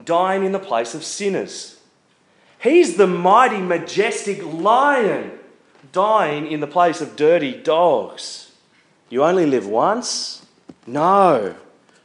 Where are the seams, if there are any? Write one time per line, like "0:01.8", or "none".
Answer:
0:09.1
0:10.8